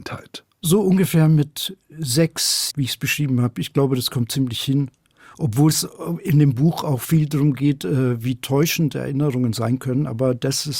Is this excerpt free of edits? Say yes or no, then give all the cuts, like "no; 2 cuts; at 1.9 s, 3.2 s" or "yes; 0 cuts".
no; 1 cut; at 2.7 s